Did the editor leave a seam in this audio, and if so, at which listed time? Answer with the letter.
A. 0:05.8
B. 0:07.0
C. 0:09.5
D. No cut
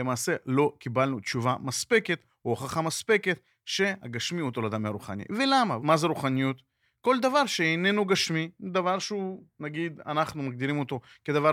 A